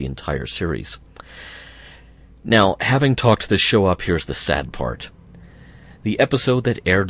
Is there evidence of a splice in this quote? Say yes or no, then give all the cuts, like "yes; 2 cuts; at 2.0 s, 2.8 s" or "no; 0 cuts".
no; 0 cuts